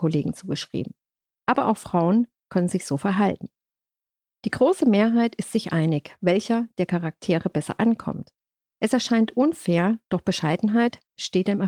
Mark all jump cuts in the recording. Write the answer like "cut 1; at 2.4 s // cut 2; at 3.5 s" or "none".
cut 1; at 8.7 s // cut 2; at 10.0 s